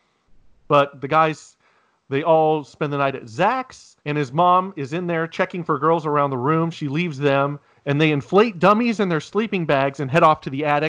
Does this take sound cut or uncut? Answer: cut